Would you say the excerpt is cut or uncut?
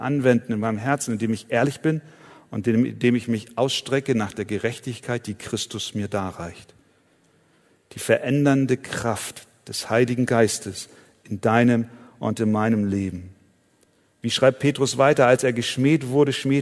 uncut